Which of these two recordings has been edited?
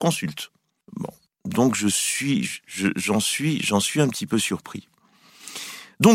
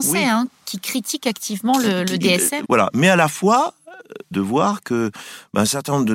second; 2 cuts; at 2.6 s, 4.3 s

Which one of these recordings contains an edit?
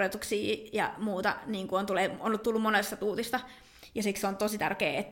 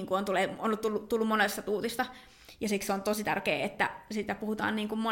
first; 1 cut; at 2.4 s

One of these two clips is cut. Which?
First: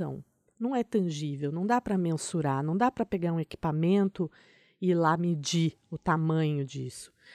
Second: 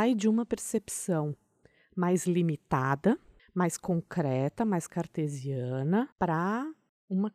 second; 1 cut; at 6.1 s

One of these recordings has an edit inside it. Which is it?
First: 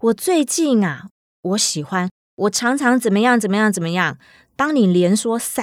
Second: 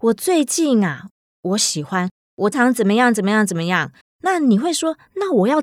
second; 2 cuts; at 2.5 s, 4.0 s

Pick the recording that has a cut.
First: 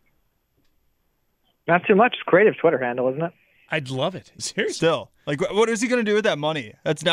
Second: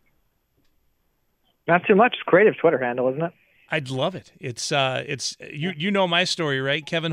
first; 1 cut; at 4.4 s

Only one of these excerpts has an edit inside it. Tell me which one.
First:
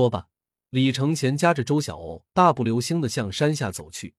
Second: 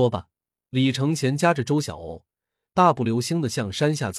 first; 1 cut; at 2.3 s

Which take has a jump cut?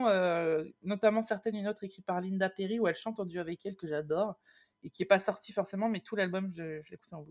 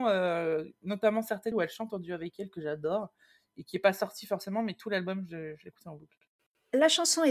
second; 1 cut; at 1.5 s

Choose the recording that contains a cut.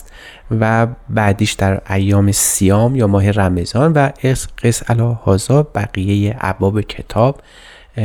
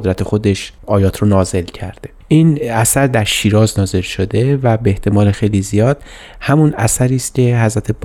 second; 1 cut; at 5.3 s

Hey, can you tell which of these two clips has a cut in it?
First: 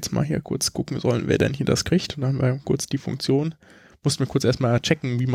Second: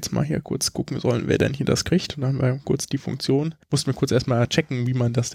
second; 1 cut; at 3.6 s

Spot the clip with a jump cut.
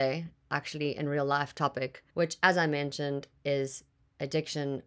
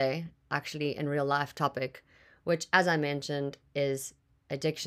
first; 1 cut; at 2.1 s

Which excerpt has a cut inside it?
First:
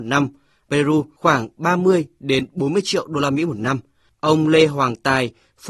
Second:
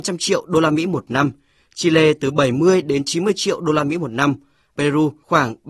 first; 1 cut; at 4.1 s

